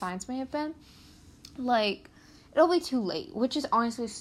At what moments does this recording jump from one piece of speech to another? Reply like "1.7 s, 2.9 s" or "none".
none